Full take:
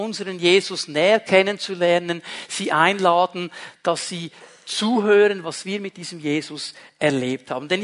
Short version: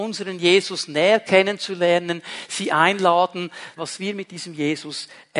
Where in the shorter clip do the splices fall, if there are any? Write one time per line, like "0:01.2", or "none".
0:03.8